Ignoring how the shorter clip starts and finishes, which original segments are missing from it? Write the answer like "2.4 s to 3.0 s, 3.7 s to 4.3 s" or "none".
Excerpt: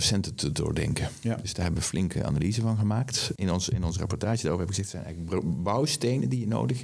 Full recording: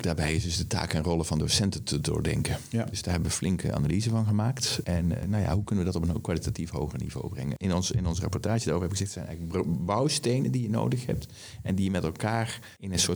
4.8 s to 7.6 s